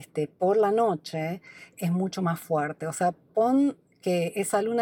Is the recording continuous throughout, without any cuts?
yes; 0 cuts

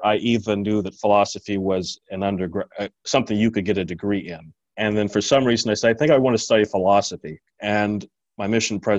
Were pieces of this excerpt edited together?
yes; 2 cuts; at 4.6 s, 7.4 s

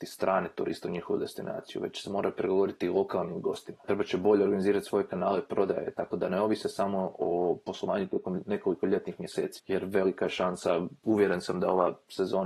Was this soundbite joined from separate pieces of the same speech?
no; 0 cuts

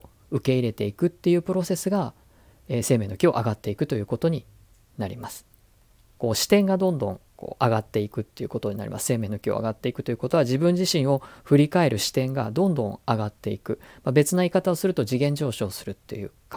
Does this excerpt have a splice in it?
yes; 1 cut; at 6.1 s

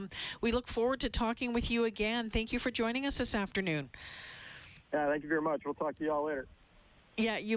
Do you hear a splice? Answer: no; 0 cuts

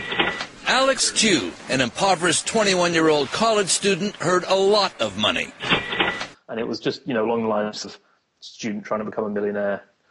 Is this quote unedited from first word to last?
no; 1 cut; at 6.3 s

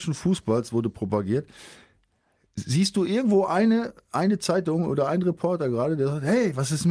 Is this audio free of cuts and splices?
yes; 0 cuts

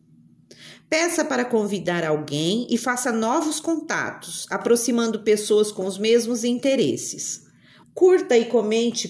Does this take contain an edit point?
yes; 1 cut; at 7.8 s

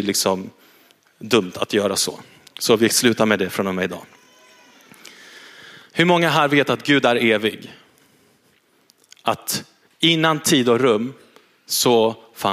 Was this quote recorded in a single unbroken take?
yes; 0 cuts

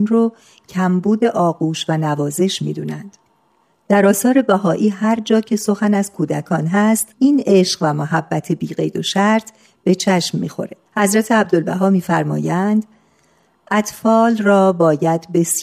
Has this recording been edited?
yes; 2 cuts; at 7.1 s, 10.9 s

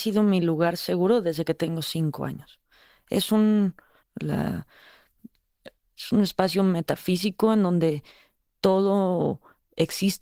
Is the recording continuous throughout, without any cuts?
no; 1 cut; at 4.0 s

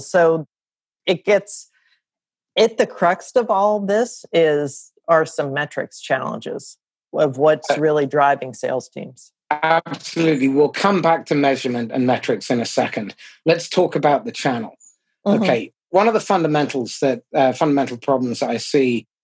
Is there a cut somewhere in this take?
no; 0 cuts

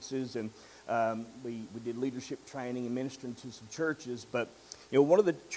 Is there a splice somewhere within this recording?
no; 0 cuts

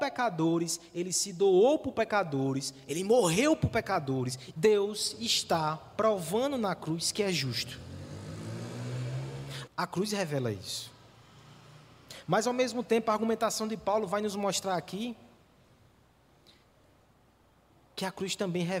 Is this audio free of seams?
no; 2 cuts; at 4.5 s, 9.7 s

